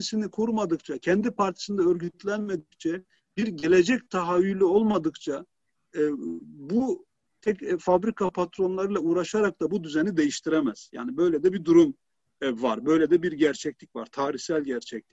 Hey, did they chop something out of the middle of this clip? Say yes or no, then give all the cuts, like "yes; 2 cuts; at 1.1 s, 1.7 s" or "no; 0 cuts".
yes; 1 cut; at 7.4 s